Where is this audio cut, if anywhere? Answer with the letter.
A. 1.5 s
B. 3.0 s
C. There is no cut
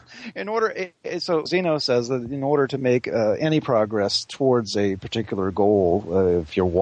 A